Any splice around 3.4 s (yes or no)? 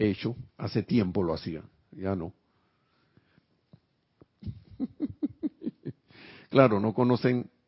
yes